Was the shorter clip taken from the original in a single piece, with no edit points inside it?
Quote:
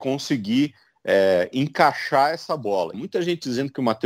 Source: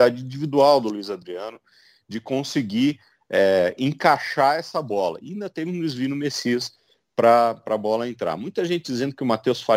no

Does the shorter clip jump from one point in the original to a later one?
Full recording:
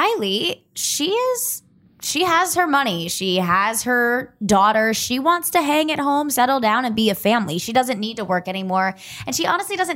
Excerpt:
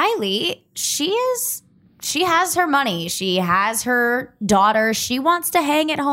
no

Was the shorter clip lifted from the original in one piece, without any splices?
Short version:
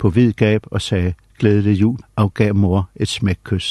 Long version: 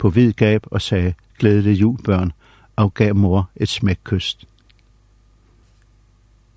no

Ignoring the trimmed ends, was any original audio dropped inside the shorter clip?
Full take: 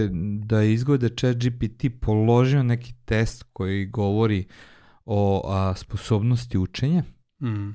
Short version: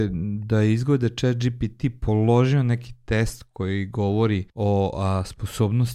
yes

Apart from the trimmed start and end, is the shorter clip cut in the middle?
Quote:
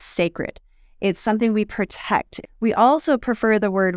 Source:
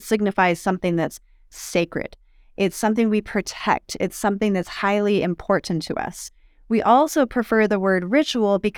yes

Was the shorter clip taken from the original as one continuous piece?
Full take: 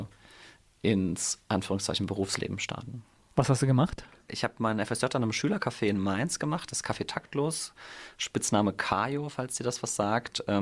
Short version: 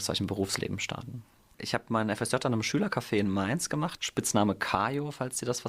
no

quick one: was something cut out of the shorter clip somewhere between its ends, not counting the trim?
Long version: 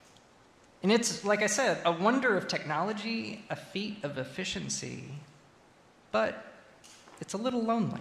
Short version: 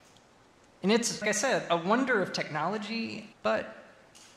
yes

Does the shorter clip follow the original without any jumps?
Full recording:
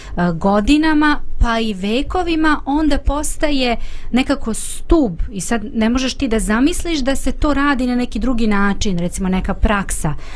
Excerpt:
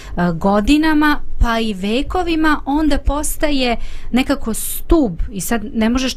yes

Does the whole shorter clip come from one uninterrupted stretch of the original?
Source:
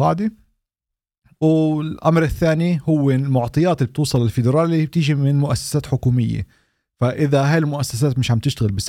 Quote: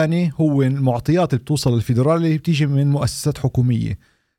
yes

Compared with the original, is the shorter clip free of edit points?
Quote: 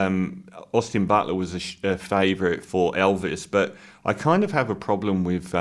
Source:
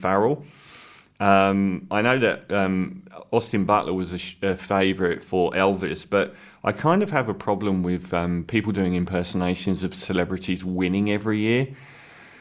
yes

